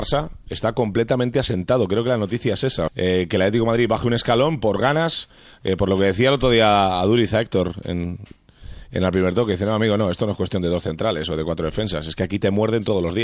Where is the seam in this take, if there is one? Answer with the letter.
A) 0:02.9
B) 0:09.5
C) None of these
A